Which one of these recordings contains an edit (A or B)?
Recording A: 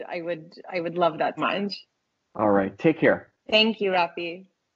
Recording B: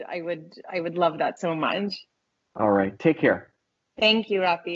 A